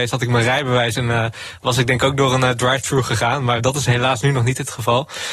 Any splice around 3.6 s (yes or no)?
yes